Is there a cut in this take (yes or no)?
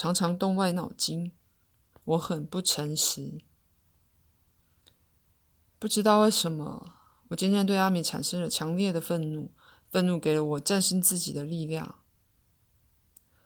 yes